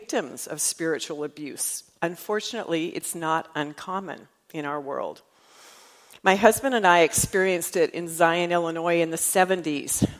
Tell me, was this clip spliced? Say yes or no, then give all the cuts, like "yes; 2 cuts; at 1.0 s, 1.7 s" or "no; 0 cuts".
no; 0 cuts